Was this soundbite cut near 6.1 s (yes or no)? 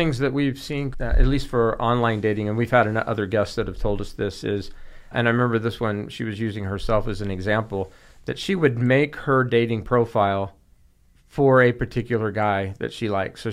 no